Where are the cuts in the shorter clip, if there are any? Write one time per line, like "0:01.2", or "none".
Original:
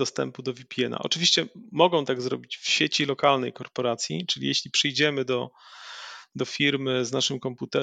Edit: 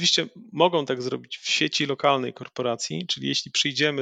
none